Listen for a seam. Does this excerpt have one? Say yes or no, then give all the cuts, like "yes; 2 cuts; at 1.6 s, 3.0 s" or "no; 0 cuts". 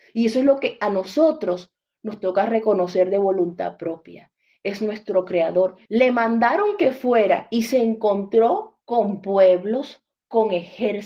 yes; 2 cuts; at 5.9 s, 8.8 s